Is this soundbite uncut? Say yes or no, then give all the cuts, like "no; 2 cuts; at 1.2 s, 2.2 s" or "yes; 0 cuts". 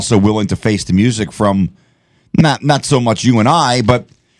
yes; 0 cuts